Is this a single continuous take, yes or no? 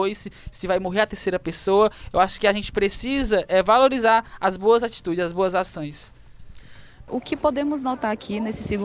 no